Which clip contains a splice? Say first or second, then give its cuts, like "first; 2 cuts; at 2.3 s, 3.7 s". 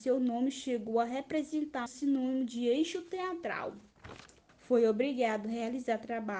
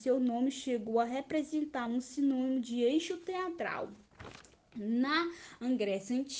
first; 2 cuts; at 1.9 s, 4.5 s